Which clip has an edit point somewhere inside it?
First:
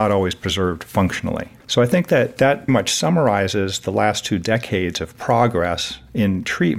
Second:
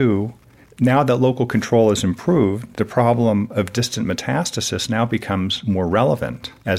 first; 2 cuts; at 1.6 s, 2.7 s

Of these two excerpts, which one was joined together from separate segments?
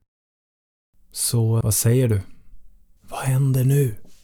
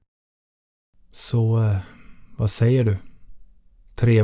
first; 2 cuts; at 1.6 s, 3.0 s

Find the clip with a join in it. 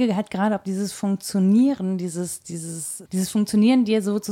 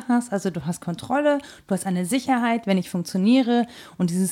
first; 1 cut; at 3.1 s

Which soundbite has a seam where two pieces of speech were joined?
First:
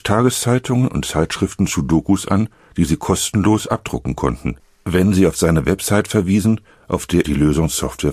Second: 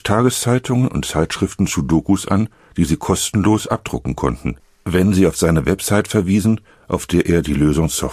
first; 1 cut; at 7.2 s

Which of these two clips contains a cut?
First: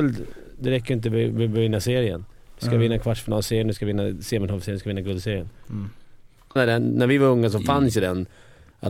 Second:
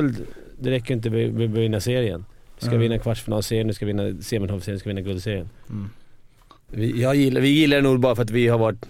first; 1 cut; at 6.6 s

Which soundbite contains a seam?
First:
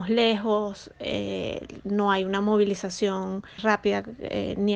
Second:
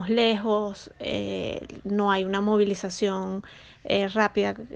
first; 1 cut; at 3.6 s

